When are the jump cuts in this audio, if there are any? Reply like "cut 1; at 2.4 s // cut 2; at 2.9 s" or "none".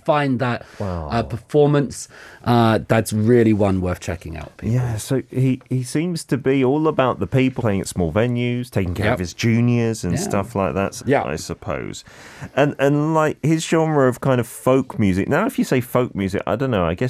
cut 1; at 7.6 s // cut 2; at 11.0 s